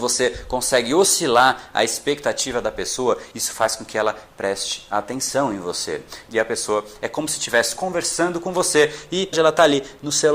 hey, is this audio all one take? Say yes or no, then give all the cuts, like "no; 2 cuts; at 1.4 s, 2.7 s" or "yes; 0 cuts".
no; 3 cuts; at 3.3 s, 6.3 s, 9.3 s